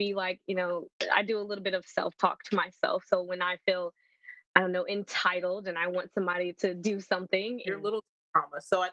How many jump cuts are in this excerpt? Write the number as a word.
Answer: one